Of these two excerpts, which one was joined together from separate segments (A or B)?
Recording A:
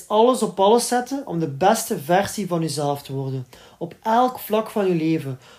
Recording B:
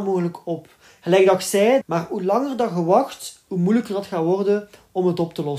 B